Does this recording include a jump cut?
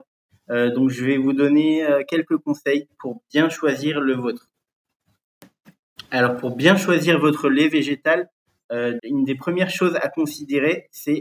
yes; 1 cut; at 9.0 s

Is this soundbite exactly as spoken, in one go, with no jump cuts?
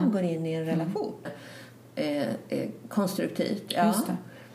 no; 1 cut; at 1.2 s

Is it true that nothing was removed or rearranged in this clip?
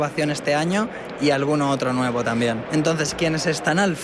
no; 1 cut; at 2.7 s

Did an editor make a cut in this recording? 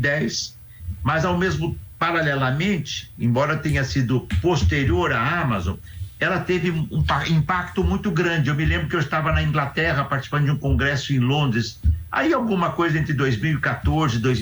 no; 0 cuts

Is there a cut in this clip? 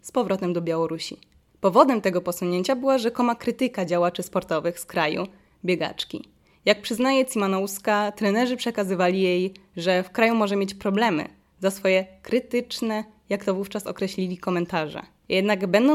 no; 0 cuts

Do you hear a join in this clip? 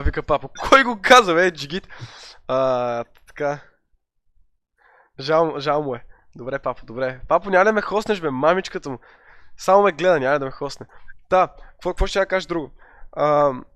no; 0 cuts

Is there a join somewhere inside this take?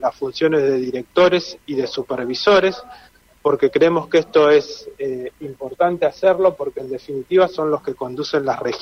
no; 0 cuts

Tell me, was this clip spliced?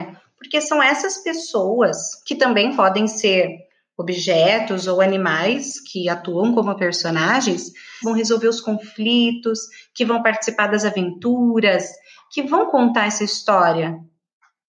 yes; 1 cut; at 8.0 s

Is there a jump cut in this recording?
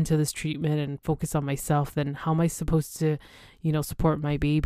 no; 0 cuts

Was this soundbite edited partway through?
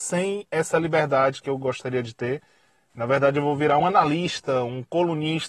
yes; 1 cut; at 3.8 s

